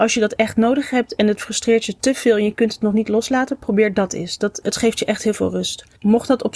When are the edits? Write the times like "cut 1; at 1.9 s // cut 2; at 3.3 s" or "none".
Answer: cut 1; at 4.6 s